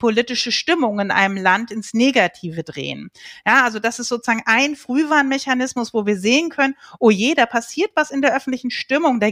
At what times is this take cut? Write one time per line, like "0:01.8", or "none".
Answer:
none